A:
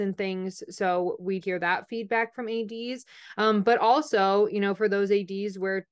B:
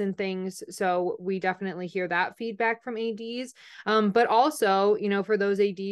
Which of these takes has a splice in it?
A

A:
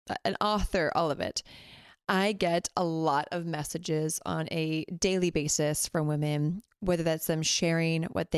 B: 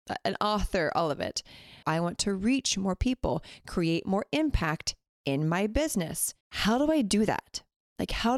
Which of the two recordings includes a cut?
B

